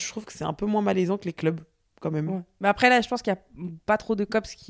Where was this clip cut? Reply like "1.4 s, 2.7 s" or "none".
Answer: none